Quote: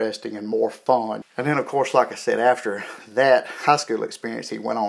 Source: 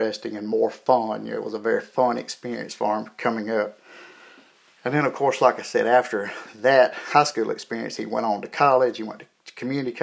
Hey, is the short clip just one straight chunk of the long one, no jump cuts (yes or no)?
no